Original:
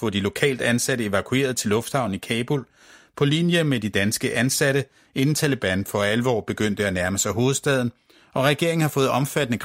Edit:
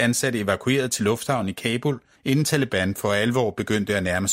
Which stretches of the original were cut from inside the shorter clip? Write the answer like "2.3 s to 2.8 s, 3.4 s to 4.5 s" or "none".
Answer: 2.8 s to 5.0 s

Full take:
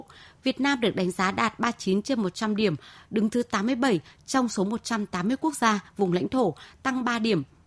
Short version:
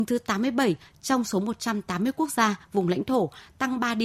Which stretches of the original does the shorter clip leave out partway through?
none

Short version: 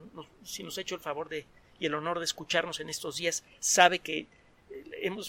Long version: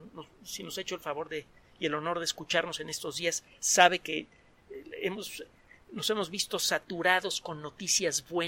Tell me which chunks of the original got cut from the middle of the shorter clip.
none

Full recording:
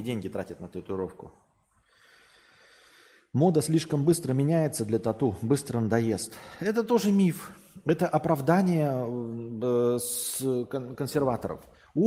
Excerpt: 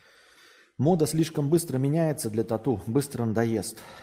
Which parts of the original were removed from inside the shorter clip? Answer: none

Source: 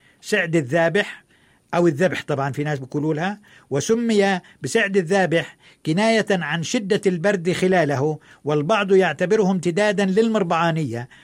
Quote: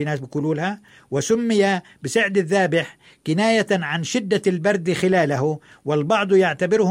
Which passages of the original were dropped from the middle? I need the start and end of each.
none

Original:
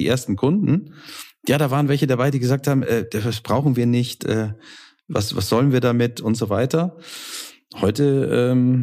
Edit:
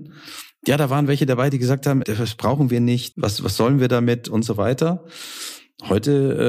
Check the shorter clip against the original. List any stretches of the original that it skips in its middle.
2.8 s to 3.1 s, 4.2 s to 5.0 s

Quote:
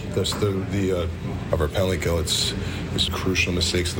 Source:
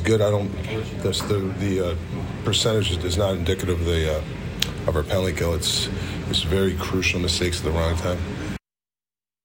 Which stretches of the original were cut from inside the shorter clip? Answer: 2.4 s to 4.8 s, 6.4 s to 6.7 s

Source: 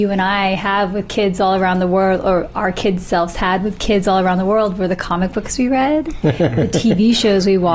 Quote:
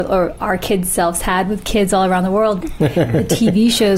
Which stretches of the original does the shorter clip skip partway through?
4.7 s to 6.0 s

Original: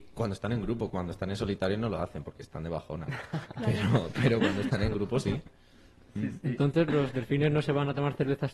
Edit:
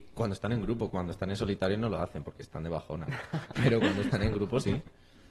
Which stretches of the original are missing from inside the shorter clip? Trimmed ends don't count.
3.5 s to 4.1 s

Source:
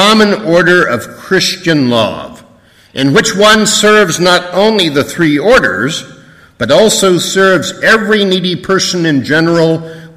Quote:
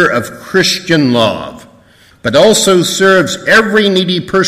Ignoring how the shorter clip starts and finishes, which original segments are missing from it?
2.9 s to 6.5 s

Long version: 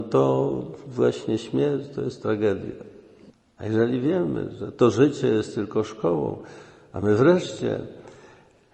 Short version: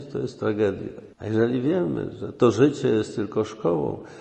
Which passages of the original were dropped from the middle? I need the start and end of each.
3.0 s to 3.5 s

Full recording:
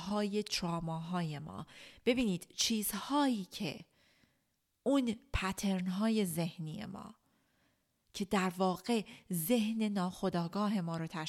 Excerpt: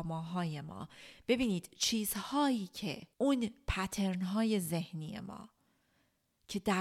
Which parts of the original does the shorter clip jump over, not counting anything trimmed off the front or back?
3.9 s to 4.8 s

